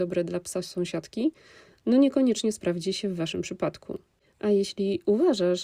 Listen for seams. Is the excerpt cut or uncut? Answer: uncut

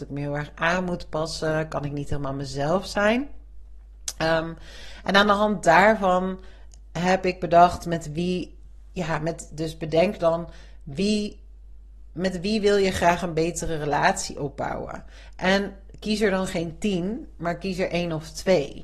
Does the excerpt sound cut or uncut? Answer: uncut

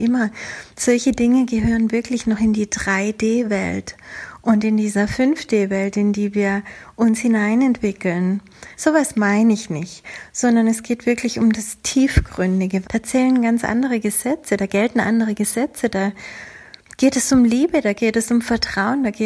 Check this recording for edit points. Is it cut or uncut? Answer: cut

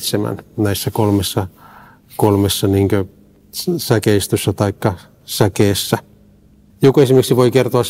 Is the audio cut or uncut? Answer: cut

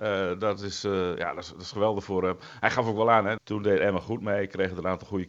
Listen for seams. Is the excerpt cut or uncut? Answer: cut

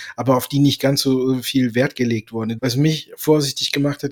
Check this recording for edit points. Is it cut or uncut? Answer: cut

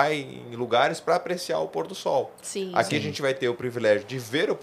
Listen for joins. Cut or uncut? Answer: uncut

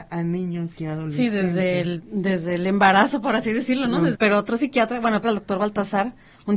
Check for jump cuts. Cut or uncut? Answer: cut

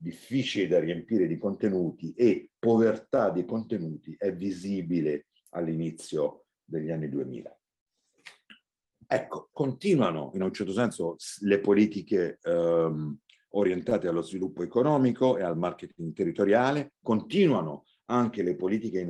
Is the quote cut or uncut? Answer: cut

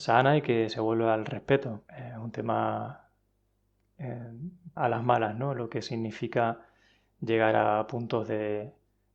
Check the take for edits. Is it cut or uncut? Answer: cut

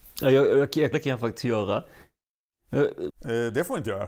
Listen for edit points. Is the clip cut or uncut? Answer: cut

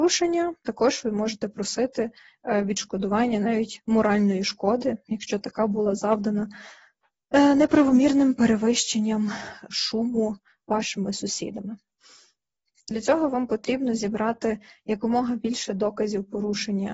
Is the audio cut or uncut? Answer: cut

